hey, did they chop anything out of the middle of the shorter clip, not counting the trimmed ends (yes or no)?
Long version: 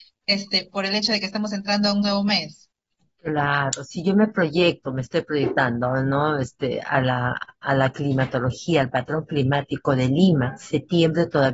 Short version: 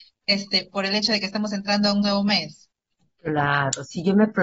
no